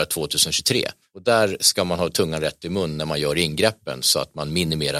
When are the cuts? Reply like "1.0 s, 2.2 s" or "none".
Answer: none